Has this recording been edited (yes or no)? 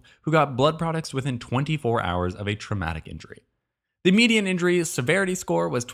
no